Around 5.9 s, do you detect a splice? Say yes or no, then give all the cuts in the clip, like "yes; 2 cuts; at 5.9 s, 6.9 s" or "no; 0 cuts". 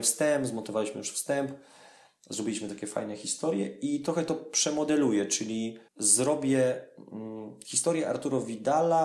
yes; 1 cut; at 5.9 s